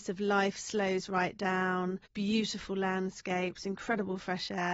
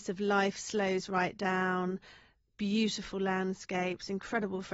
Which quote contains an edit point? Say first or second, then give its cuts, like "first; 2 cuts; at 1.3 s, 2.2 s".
first; 1 cut; at 2.1 s